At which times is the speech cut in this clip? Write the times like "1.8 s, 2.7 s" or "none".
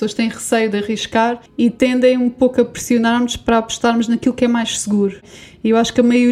1.5 s